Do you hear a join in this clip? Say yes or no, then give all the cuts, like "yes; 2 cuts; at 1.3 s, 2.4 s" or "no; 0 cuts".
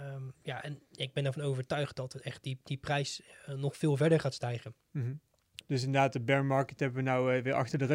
yes; 1 cut; at 5.6 s